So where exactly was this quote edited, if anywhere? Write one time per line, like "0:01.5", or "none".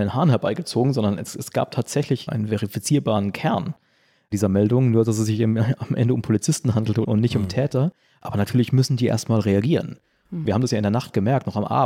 0:02.3
0:10.5